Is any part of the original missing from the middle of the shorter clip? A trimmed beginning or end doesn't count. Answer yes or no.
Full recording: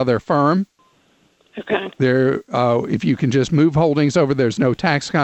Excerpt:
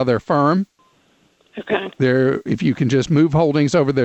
yes